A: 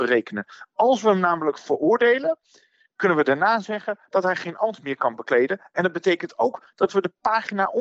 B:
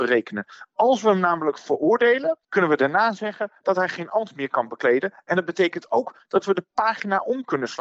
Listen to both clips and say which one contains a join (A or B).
B